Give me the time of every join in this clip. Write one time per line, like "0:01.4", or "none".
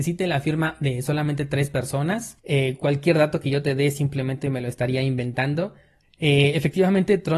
0:02.4
0:06.0